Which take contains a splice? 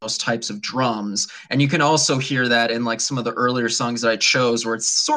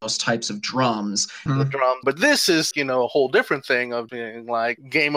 second; 3 cuts; at 1.5 s, 2.7 s, 4.1 s

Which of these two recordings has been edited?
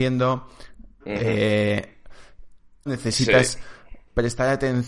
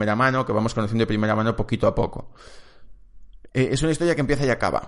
first; 2 cuts; at 1.0 s, 2.9 s

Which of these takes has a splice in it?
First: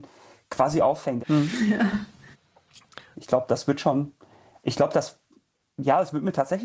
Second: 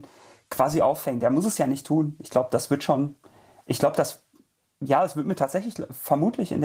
first; 2 cuts; at 1.2 s, 3.1 s

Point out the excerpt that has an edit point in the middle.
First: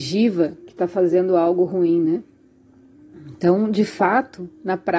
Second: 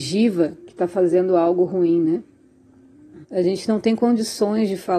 second; 1 cut; at 3.2 s

